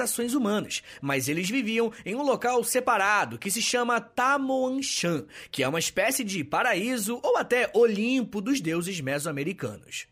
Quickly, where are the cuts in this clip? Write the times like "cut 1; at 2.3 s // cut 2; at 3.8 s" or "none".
none